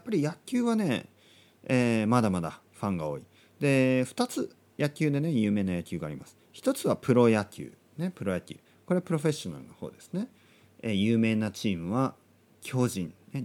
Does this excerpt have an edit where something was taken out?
no; 0 cuts

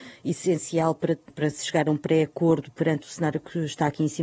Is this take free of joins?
no; 1 cut; at 1.3 s

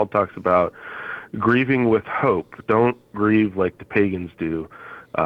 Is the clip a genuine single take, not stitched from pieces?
yes; 0 cuts

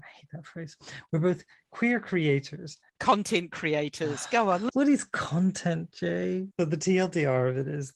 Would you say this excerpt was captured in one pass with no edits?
no; 2 cuts; at 4.7 s, 6.5 s

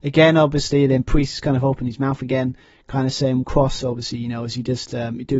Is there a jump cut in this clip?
yes; 1 cut; at 3.4 s

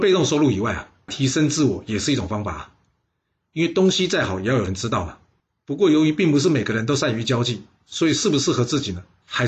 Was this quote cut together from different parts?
yes; 1 cut; at 1.1 s

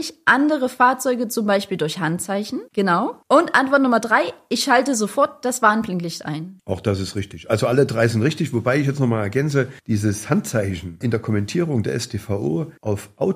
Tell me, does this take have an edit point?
yes; 1 cut; at 2.7 s

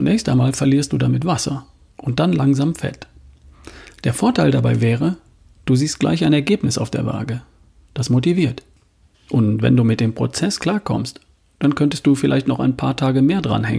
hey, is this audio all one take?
yes; 0 cuts

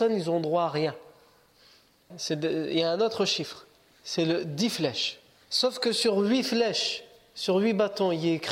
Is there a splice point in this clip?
yes; 2 cuts; at 2.1 s, 5.5 s

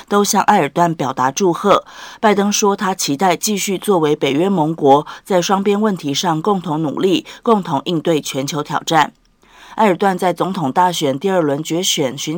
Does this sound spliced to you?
yes; 1 cut; at 9.7 s

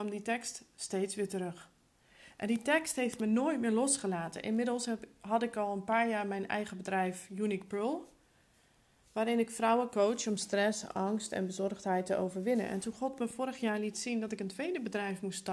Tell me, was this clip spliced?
no; 0 cuts

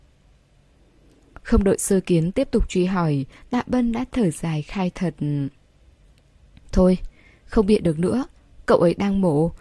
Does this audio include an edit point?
no; 0 cuts

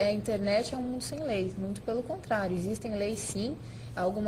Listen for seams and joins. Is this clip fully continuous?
yes; 0 cuts

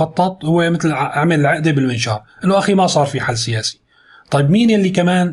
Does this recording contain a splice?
no; 0 cuts

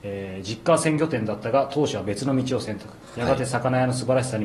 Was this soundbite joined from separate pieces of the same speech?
no; 0 cuts

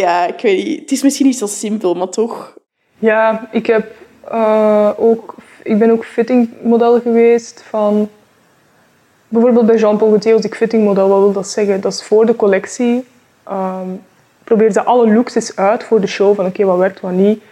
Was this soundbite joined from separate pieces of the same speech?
no; 0 cuts

